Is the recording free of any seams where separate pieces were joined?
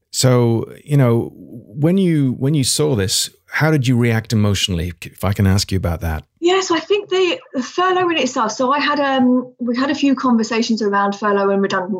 yes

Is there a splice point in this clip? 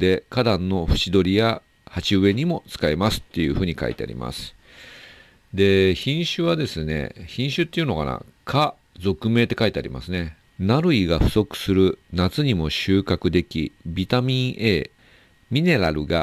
yes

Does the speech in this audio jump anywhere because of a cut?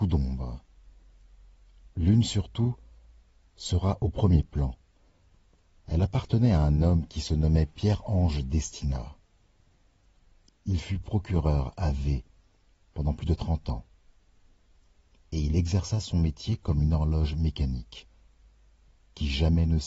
no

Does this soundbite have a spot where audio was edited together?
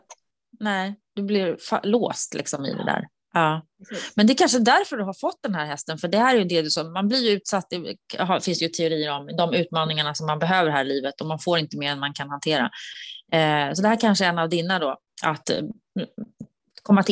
yes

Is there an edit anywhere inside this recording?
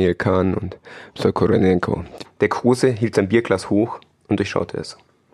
yes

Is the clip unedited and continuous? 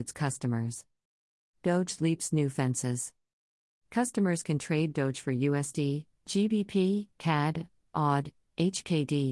no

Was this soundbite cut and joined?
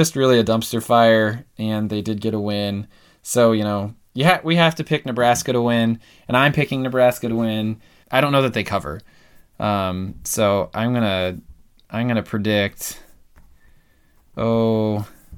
yes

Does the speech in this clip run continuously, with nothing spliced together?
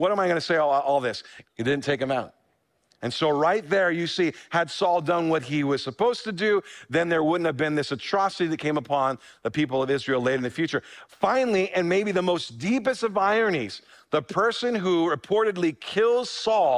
no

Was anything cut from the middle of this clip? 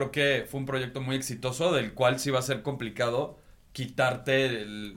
no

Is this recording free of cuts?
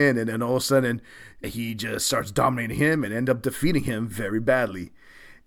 no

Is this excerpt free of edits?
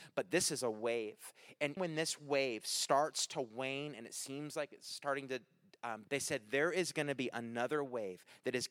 no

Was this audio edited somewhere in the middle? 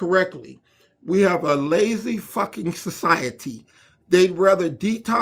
no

